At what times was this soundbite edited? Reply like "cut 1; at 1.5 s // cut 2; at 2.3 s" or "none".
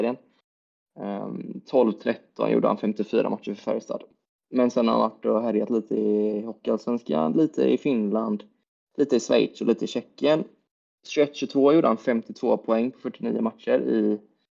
none